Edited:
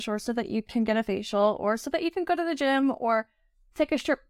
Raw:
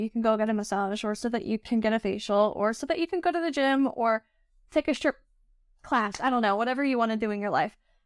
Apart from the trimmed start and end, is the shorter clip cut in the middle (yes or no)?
no